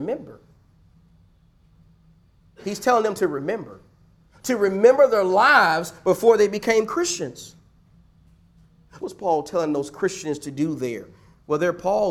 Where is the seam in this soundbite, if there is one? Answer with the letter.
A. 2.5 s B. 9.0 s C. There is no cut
B